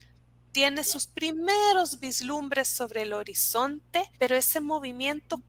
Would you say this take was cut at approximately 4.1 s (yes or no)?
yes